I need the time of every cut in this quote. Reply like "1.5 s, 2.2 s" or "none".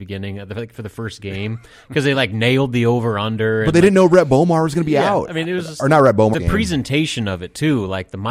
6.3 s